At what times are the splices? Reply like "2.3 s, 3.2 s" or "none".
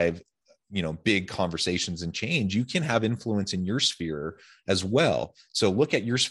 none

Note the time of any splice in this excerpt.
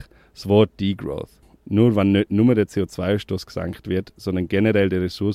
1.5 s

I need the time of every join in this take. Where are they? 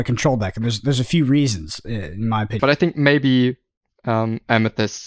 2.6 s

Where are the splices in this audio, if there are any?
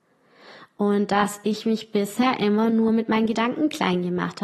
none

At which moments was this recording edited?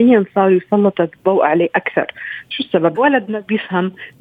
2.9 s

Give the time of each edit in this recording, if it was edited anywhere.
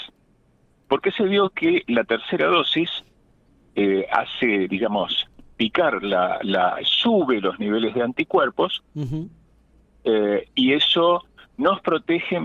6.8 s

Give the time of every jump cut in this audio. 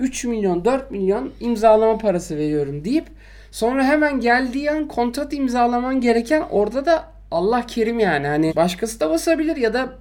8.5 s

